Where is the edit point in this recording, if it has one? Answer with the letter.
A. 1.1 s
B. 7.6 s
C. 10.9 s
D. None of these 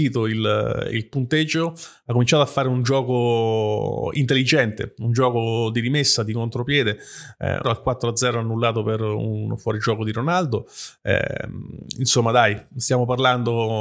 B